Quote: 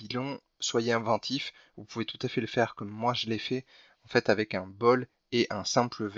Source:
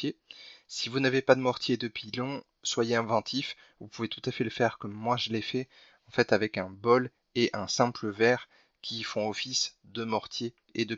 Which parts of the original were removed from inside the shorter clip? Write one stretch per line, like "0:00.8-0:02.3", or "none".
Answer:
none